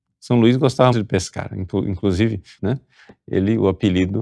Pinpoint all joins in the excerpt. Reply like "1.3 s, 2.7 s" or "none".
0.9 s, 2.6 s